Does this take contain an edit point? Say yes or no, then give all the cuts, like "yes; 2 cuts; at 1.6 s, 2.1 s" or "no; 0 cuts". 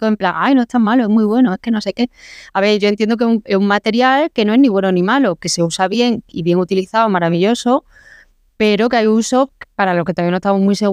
no; 0 cuts